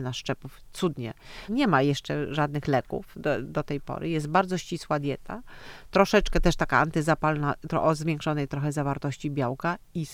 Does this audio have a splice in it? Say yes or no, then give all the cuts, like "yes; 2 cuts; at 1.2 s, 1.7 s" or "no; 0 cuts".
yes; 1 cut; at 1.5 s